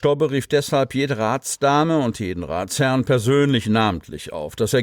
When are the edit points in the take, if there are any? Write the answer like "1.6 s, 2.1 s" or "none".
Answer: none